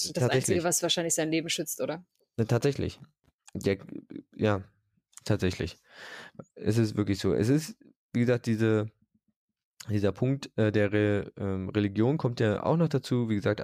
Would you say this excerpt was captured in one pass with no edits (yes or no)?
yes